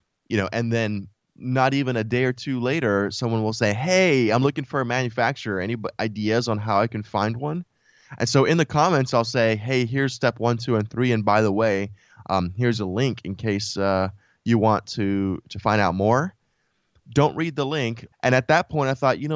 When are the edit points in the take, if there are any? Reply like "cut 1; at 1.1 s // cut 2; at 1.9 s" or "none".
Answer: cut 1; at 18.1 s